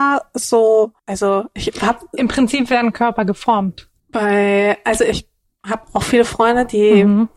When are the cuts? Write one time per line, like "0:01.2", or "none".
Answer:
0:01.0
0:04.0